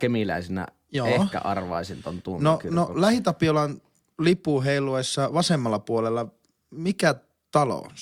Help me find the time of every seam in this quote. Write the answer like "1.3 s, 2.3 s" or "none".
none